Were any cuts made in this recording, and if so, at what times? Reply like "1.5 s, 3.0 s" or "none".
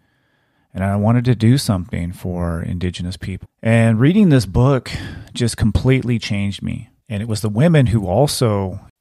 3.4 s, 7.0 s